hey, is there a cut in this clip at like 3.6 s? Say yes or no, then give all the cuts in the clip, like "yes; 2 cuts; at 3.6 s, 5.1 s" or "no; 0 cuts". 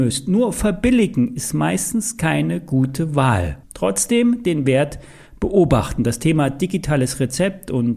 yes; 1 cut; at 3.6 s